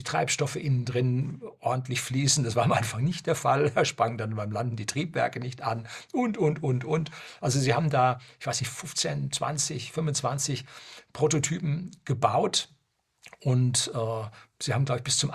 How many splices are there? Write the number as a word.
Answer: zero